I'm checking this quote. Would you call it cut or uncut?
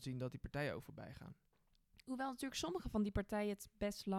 uncut